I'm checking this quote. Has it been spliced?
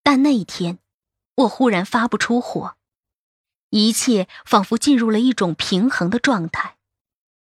no; 0 cuts

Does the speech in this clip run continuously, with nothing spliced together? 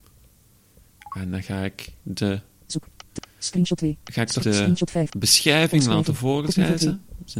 no; 1 cut; at 4.4 s

